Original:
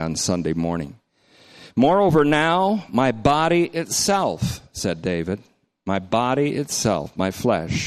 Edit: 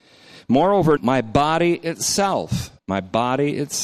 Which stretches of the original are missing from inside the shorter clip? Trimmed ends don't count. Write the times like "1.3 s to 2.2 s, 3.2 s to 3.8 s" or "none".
2.2 s to 2.9 s, 4.7 s to 5.8 s